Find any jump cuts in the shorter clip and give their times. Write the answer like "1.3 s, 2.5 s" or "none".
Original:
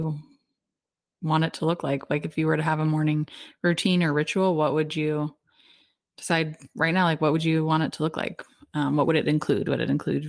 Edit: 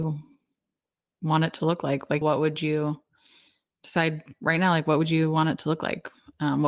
2.2 s